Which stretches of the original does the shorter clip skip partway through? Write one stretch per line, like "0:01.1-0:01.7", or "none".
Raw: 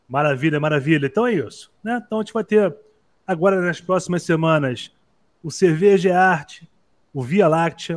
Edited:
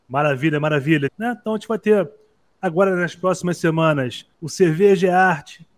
0:01.1-0:01.7
0:05.0-0:05.4